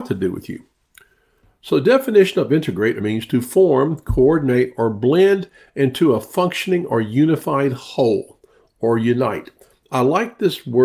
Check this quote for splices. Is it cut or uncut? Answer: cut